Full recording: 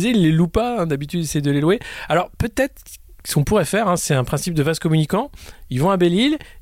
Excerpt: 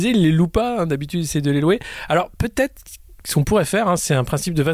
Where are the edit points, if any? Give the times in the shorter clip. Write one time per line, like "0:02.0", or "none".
none

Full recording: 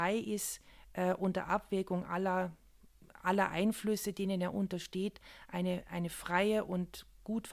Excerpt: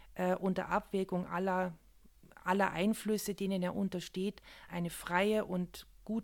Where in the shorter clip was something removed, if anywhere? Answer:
0:04.7

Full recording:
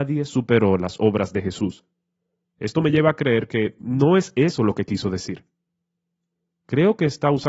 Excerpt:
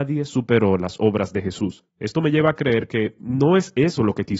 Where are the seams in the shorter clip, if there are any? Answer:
0:01.9

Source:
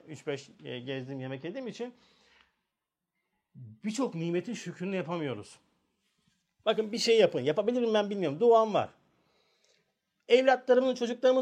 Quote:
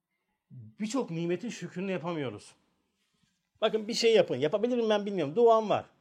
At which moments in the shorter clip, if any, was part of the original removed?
none

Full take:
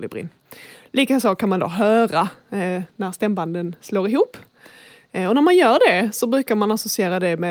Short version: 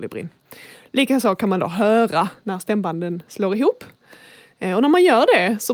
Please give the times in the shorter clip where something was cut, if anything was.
0:02.4

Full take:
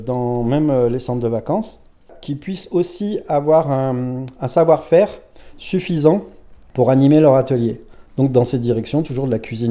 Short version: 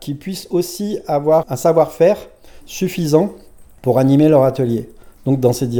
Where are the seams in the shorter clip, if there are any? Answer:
0:01.4

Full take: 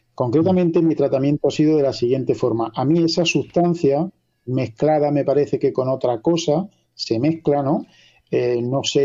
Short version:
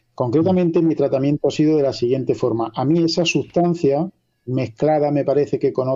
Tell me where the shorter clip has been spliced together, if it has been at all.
none

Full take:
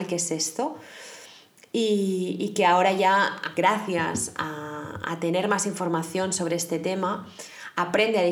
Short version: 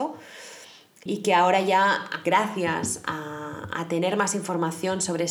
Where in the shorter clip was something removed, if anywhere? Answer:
0:01.1

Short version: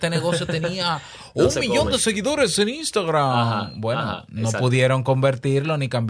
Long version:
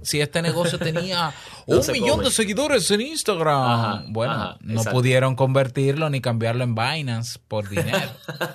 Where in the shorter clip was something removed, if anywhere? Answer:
none

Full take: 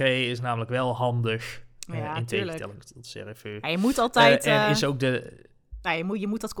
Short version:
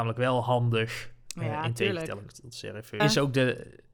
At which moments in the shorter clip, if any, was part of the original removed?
0:03.0

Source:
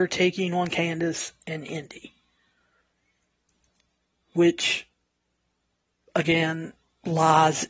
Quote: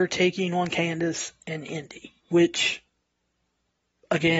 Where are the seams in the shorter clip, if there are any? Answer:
0:02.2

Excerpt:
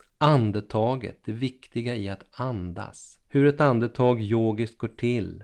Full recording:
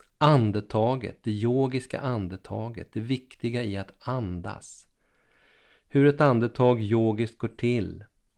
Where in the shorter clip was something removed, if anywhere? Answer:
0:01.2
0:03.2

